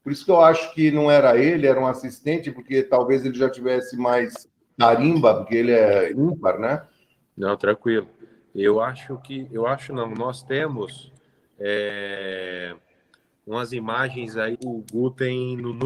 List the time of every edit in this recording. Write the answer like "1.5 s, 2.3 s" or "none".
7.2 s, 14.5 s